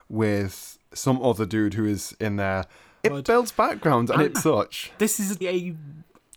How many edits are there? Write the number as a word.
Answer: three